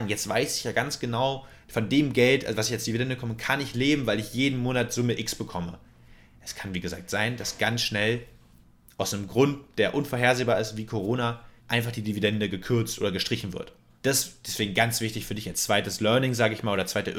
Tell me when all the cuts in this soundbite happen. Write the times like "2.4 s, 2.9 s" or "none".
11.6 s, 14.0 s